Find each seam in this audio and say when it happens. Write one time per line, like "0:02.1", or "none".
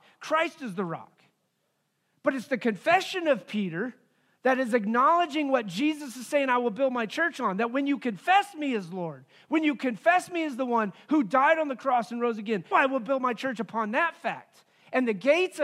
0:12.7